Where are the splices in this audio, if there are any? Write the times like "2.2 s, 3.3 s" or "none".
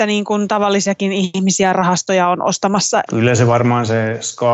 3.1 s